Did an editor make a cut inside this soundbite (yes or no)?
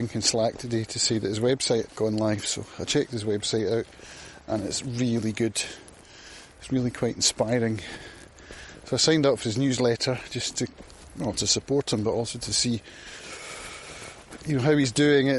no